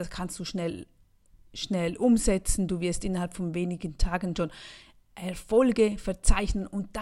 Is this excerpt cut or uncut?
uncut